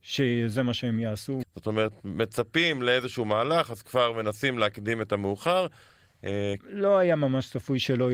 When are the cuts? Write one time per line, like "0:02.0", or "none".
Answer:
0:01.4
0:06.6